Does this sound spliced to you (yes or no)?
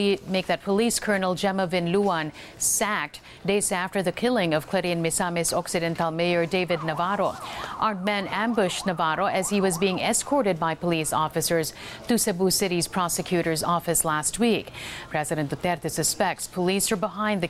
yes